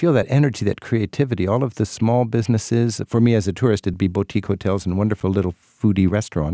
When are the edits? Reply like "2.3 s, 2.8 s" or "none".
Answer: none